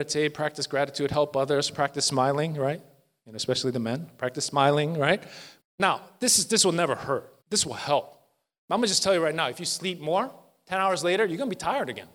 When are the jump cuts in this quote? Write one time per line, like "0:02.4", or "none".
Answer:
0:05.6
0:07.4